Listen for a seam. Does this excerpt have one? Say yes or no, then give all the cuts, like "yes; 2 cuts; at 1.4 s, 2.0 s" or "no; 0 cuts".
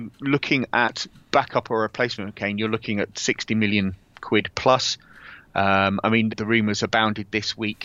yes; 1 cut; at 6.3 s